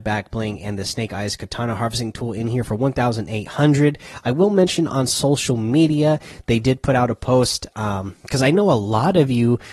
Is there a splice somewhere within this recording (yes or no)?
no